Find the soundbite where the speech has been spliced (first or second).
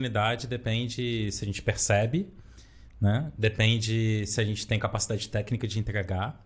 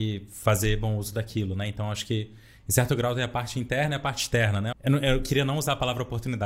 second